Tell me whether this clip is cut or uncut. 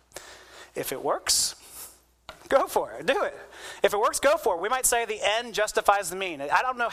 uncut